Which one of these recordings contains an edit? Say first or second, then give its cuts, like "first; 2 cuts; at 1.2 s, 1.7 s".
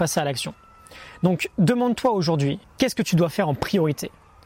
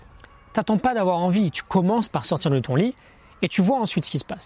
first; 1 cut; at 2.6 s